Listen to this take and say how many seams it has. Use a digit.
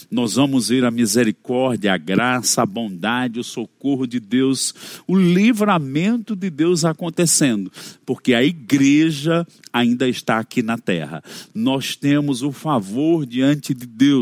0